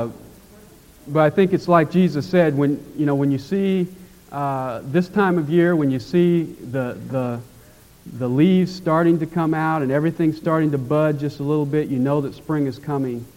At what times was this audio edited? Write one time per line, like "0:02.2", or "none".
none